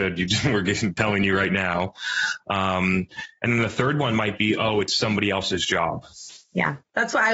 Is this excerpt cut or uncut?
uncut